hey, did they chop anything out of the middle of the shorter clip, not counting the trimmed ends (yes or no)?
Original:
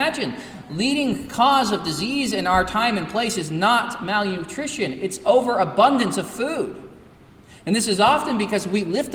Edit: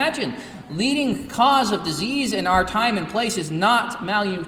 no